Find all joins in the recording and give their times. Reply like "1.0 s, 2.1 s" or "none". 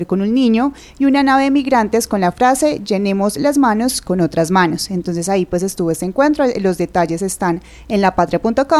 none

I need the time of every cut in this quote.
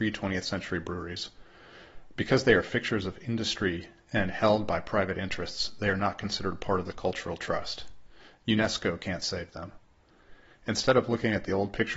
none

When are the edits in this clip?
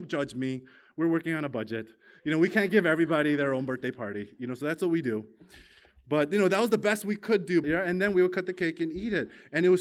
7.6 s

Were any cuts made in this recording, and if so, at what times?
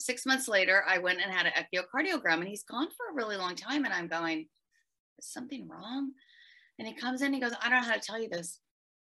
none

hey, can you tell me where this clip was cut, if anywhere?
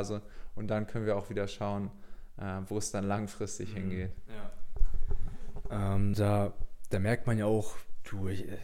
6.1 s

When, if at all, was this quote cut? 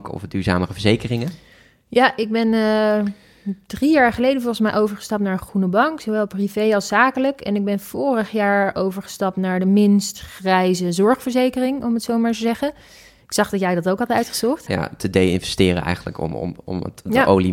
14.7 s

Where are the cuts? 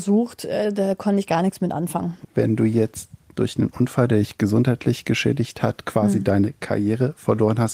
2.2 s

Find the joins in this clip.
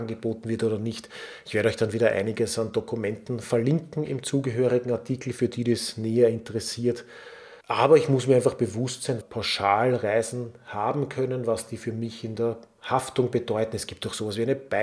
7.6 s, 9.2 s

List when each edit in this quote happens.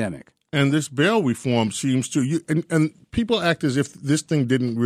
none

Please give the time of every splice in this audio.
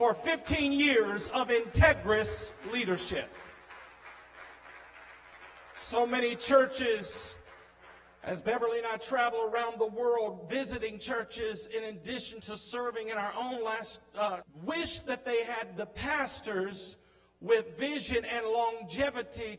14.4 s

